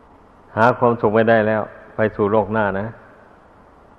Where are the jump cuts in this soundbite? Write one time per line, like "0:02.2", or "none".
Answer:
none